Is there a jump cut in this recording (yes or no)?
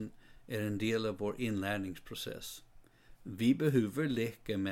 no